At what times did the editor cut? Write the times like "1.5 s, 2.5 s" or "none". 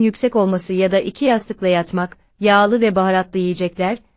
none